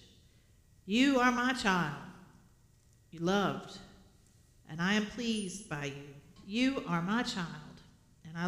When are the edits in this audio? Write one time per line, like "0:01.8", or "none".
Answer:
0:06.4